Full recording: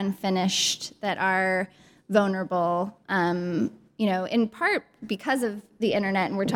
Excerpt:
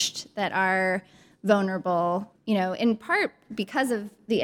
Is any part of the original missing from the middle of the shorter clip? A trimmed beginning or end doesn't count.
yes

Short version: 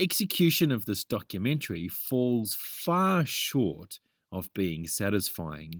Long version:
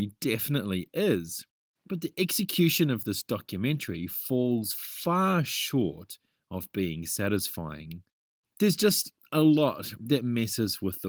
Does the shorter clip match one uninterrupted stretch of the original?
yes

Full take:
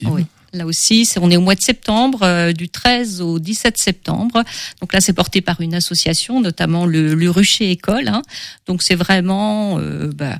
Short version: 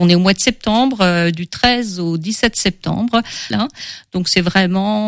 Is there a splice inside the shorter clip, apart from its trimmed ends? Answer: yes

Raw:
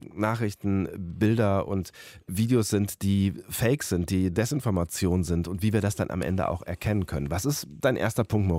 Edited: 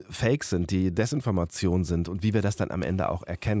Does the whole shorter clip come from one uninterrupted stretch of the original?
yes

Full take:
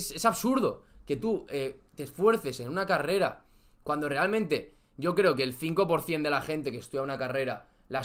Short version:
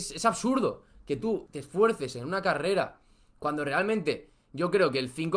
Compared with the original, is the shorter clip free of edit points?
no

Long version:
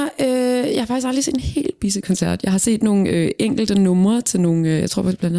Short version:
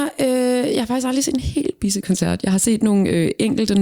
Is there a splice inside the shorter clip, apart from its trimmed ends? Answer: no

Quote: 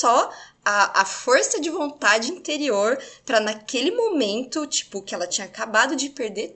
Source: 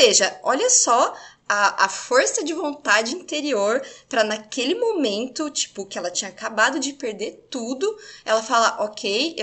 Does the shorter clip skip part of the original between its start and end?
no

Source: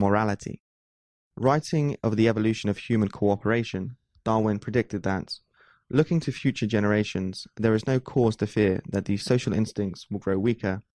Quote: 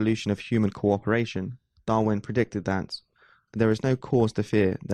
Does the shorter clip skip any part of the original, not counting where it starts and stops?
yes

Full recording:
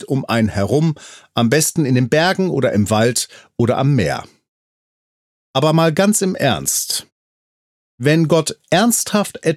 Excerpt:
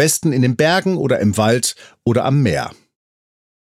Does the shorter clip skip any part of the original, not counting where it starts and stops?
no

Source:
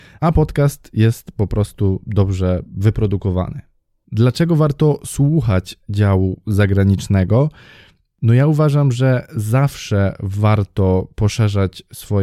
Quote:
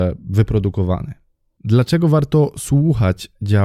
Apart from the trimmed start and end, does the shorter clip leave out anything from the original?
no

